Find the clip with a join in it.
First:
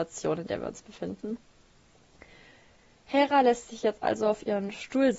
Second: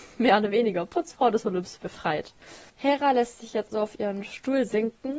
second; 2 cuts; at 2.7 s, 3.7 s

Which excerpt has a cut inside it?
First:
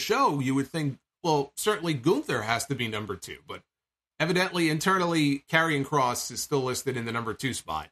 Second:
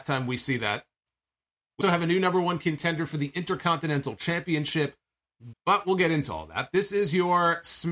second; 2 cuts; at 1.8 s, 5.5 s

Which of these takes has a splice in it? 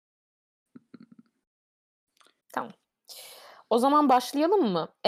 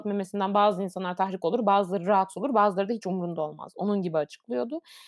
first; 1 cut; at 2.4 s

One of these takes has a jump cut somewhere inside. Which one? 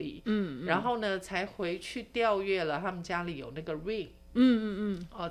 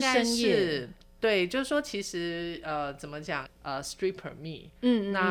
second; 1 cut; at 3.5 s

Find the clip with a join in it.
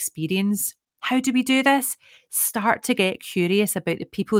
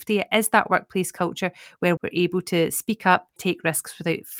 second; 2 cuts; at 2.0 s, 3.4 s

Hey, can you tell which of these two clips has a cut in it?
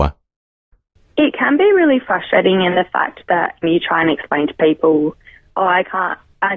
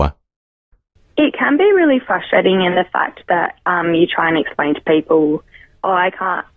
first; 1 cut; at 3.6 s

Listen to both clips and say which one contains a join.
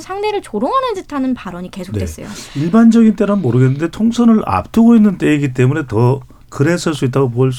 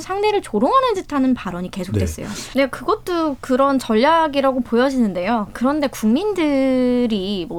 second; 1 cut; at 2.5 s

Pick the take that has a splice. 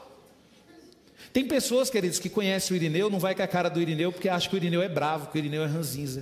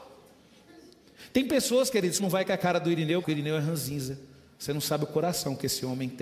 second; 2 cuts; at 2.2 s, 3.2 s

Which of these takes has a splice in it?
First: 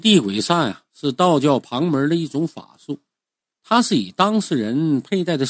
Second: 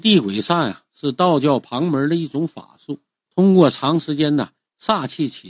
second; 1 cut; at 3.2 s

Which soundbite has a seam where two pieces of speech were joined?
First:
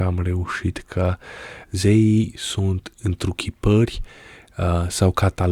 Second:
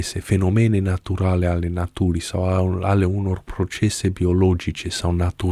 first; 1 cut; at 1.6 s

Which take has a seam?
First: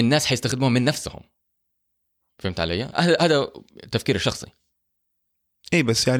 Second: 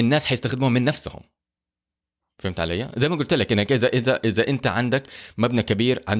first; 1 cut; at 2.9 s

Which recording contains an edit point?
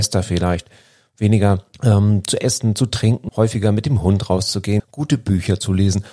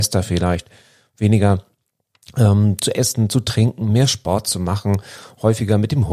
first; 3 cuts; at 1.7 s, 3.3 s, 4.8 s

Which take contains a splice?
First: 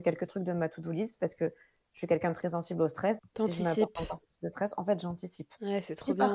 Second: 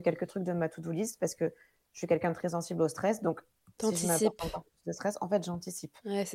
first; 1 cut; at 3.2 s

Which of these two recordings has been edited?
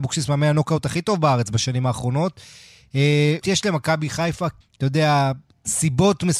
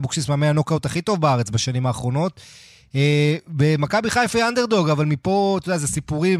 first; 2 cuts; at 3.4 s, 4.6 s

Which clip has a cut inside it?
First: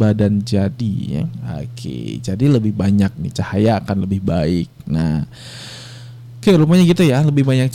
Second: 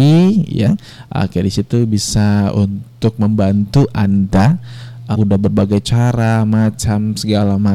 second; 1 cut; at 5.1 s

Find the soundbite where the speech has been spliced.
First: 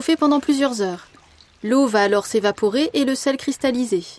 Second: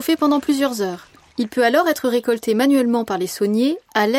second; 1 cut; at 1.3 s

